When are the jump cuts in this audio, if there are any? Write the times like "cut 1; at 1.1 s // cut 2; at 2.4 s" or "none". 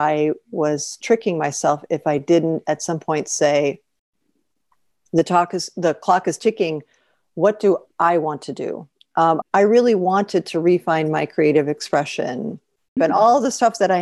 cut 1; at 9.4 s // cut 2; at 13.0 s